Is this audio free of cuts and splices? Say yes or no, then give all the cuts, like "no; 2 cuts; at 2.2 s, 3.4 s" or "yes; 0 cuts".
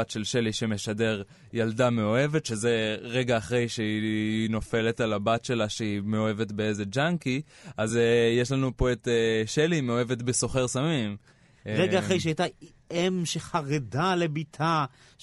yes; 0 cuts